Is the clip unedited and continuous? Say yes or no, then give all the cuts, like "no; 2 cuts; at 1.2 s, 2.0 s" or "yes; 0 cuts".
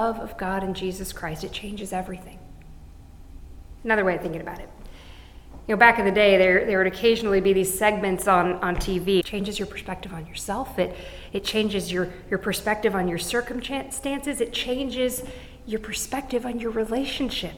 no; 2 cuts; at 3.8 s, 9.2 s